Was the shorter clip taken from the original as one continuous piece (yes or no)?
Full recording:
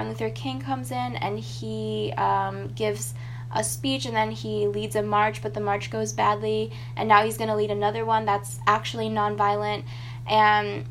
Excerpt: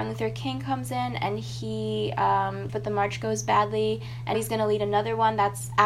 no